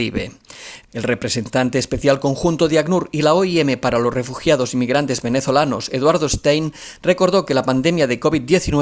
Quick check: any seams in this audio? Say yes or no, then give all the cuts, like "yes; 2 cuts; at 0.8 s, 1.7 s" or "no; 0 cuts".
no; 0 cuts